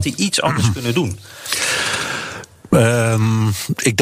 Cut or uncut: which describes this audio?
uncut